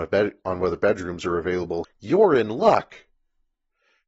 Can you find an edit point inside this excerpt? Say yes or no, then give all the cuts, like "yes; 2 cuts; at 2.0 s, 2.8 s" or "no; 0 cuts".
yes; 1 cut; at 1.8 s